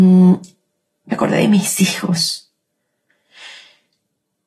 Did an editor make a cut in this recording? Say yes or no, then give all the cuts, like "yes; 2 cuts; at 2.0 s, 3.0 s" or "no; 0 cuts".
no; 0 cuts